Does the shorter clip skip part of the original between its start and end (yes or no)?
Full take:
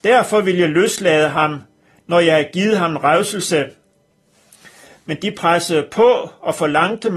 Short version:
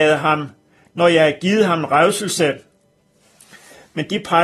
no